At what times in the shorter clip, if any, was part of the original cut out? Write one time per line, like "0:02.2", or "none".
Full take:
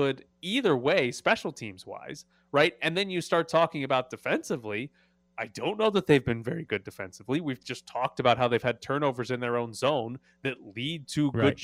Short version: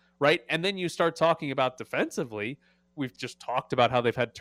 0:03.0